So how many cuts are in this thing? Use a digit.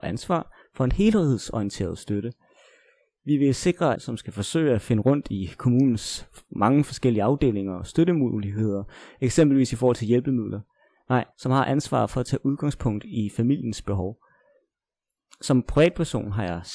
2